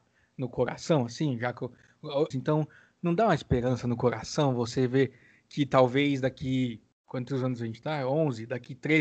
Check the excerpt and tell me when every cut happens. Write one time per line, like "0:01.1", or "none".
0:02.3
0:06.9